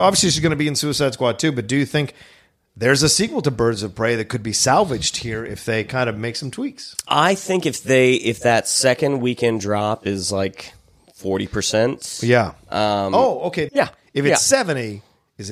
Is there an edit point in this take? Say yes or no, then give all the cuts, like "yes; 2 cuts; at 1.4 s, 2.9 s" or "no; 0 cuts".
yes; 1 cut; at 13.7 s